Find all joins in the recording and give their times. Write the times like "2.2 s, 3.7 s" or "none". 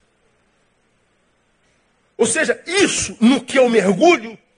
none